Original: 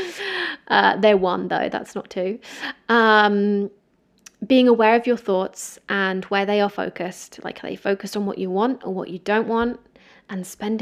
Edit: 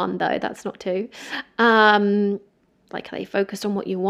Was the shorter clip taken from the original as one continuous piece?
no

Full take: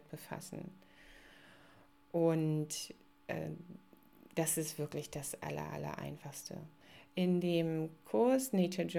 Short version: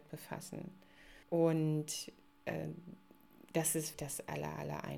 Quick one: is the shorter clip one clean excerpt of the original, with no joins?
no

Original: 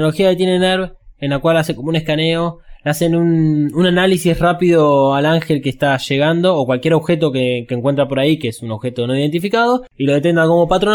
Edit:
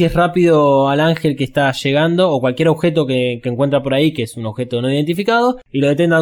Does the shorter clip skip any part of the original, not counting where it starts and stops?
no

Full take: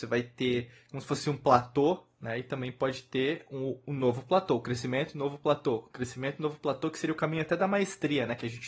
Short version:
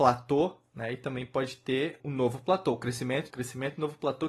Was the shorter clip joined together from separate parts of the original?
yes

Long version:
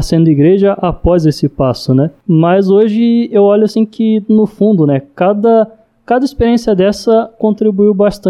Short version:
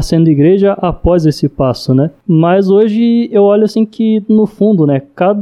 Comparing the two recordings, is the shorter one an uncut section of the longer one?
yes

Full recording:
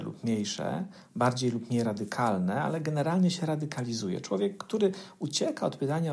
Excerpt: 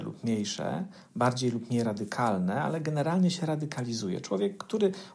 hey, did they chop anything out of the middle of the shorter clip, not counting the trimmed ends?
no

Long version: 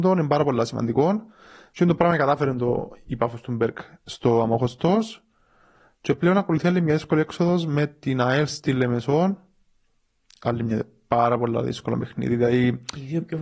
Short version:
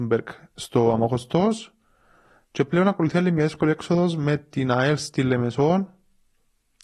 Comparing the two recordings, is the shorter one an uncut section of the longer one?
yes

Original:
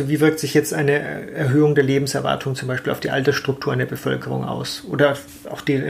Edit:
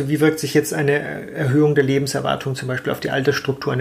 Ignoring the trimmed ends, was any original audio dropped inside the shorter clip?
no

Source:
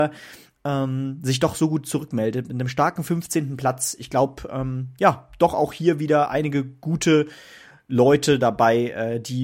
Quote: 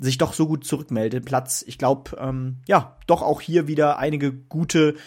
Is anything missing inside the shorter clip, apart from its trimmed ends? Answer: yes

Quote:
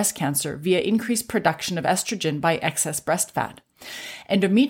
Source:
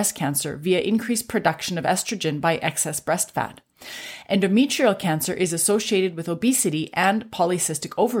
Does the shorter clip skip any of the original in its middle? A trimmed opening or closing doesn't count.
no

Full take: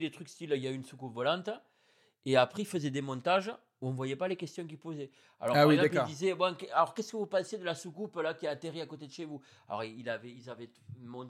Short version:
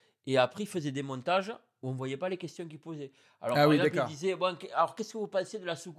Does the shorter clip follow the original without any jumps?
yes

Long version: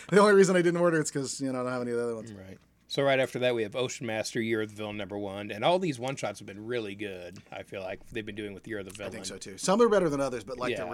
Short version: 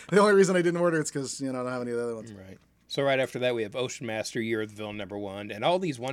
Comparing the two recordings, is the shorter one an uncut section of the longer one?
yes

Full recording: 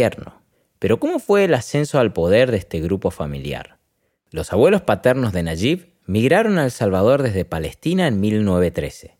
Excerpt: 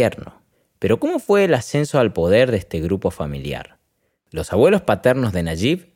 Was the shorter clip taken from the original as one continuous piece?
yes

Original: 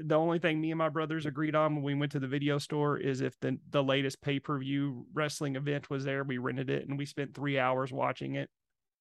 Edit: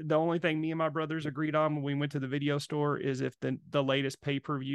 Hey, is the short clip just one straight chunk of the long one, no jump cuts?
yes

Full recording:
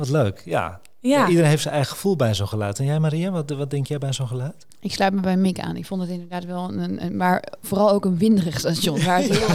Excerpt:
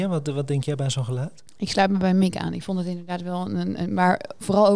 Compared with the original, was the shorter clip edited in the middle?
no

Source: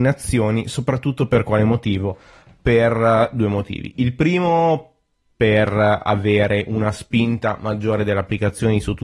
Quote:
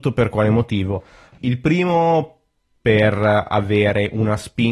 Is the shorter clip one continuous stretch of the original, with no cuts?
no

